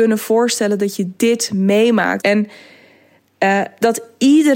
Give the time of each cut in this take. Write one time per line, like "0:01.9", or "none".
0:02.2